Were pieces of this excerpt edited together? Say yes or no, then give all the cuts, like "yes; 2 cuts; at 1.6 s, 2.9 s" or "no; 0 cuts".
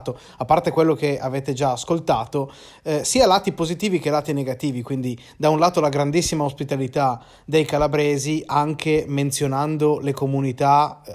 no; 0 cuts